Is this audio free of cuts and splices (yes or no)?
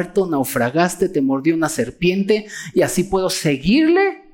yes